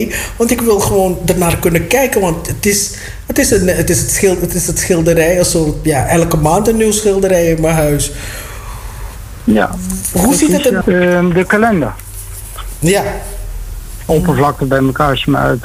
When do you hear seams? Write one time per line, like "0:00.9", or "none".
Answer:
0:10.8
0:14.1